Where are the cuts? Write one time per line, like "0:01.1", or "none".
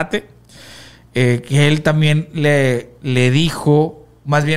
none